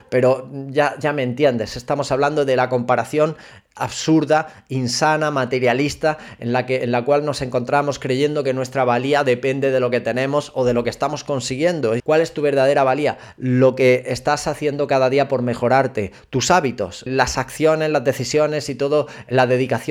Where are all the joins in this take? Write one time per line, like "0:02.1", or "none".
0:12.0
0:17.1